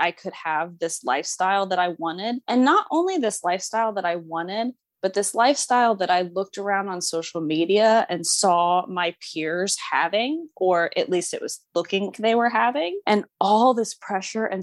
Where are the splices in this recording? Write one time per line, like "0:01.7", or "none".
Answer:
0:12.1